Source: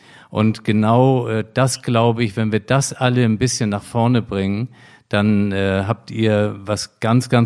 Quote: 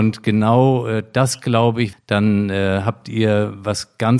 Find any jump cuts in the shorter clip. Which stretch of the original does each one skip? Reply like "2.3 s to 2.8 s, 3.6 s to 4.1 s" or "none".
2.3 s to 5.0 s